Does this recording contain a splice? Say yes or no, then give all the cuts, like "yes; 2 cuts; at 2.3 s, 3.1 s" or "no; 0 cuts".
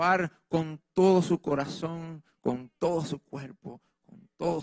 no; 0 cuts